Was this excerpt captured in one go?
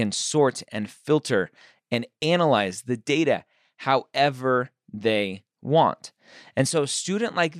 yes; 0 cuts

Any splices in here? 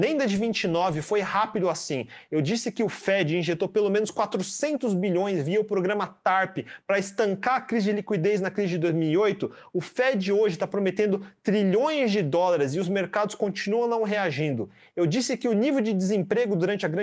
no; 0 cuts

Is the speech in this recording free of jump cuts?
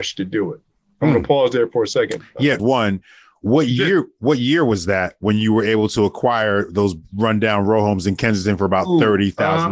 no; 1 cut; at 2.6 s

